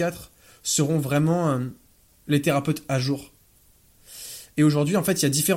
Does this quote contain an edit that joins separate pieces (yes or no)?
no